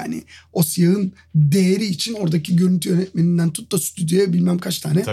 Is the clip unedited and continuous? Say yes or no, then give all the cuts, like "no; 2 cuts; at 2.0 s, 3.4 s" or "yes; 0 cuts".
yes; 0 cuts